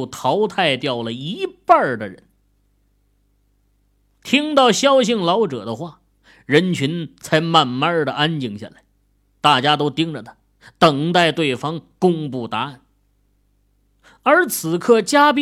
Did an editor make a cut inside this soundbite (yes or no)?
no